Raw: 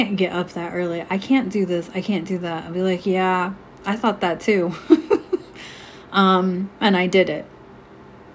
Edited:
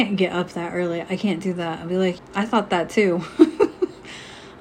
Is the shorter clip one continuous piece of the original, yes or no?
no